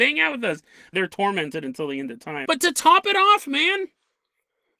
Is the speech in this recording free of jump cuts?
no; 1 cut; at 2.5 s

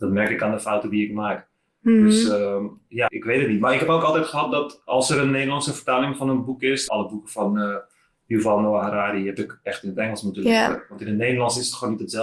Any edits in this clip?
yes; 2 cuts; at 3.1 s, 6.9 s

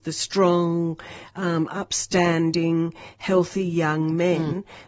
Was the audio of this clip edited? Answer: no; 0 cuts

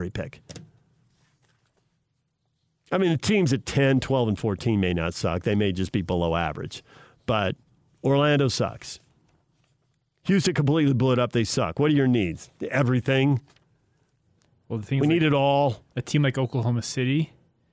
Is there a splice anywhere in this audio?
no; 0 cuts

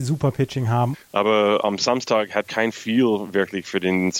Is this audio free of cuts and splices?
no; 2 cuts; at 0.9 s, 2.4 s

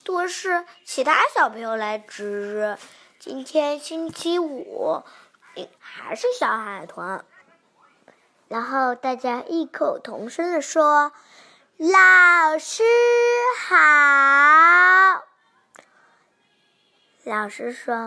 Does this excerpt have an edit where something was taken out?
yes; 2 cuts; at 5.8 s, 7.4 s

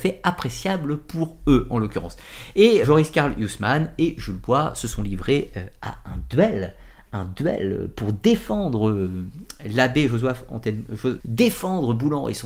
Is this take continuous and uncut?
no; 2 cuts; at 2.8 s, 11.2 s

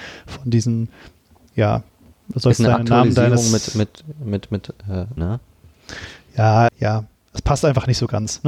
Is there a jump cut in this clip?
yes; 2 cuts; at 5.2 s, 6.7 s

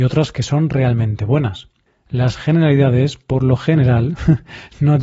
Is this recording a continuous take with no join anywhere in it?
yes; 0 cuts

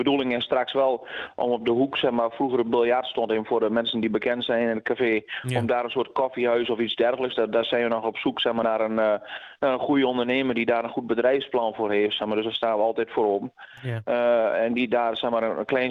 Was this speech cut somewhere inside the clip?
no; 0 cuts

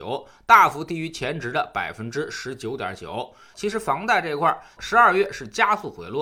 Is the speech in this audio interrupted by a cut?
yes; 2 cuts; at 3.5 s, 4.8 s

